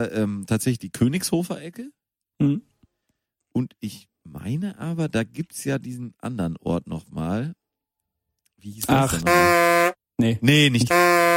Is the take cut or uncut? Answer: uncut